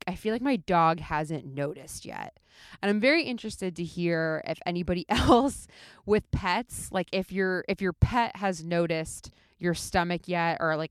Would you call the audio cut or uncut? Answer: uncut